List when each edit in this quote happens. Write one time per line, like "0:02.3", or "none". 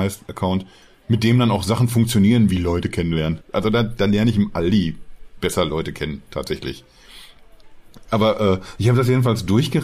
0:03.4
0:08.1